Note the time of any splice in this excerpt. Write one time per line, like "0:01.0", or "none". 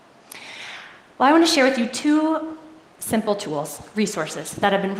none